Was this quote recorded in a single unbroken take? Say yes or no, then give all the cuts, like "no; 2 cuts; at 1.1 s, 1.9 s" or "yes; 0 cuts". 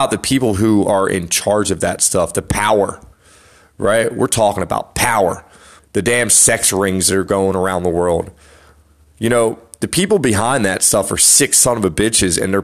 no; 1 cut; at 5.8 s